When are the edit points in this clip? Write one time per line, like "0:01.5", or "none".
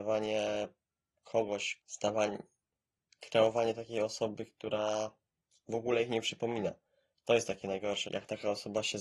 0:01.8
0:08.1